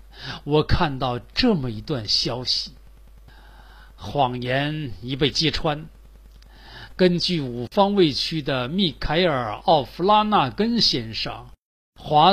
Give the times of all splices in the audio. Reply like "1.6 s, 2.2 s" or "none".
none